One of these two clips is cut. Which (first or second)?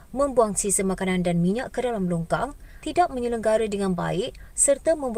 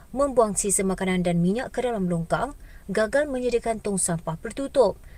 first